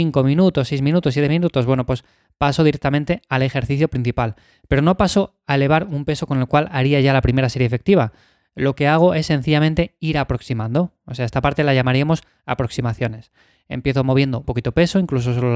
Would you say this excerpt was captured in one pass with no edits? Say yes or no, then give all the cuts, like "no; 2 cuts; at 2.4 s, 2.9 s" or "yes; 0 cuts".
no; 1 cut; at 14.4 s